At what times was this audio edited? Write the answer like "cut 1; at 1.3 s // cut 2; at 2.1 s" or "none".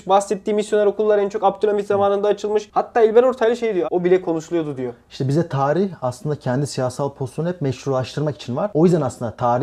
cut 1; at 3.8 s